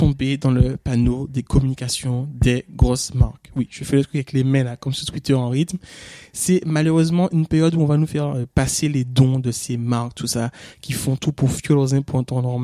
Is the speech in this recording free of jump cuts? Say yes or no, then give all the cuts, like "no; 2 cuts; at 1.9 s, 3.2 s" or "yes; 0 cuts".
yes; 0 cuts